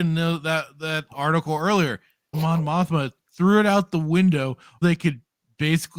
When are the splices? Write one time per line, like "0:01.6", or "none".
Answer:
0:02.3
0:04.8

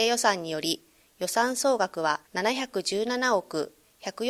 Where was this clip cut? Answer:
0:02.3

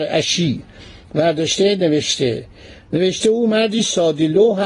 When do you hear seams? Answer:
none

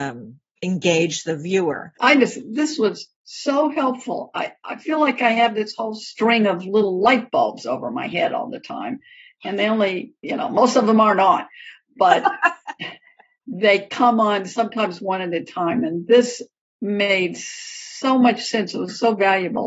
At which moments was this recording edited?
0:02.0
0:03.2

